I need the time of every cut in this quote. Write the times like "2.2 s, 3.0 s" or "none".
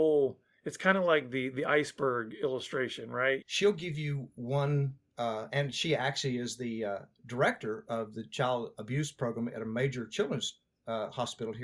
3.4 s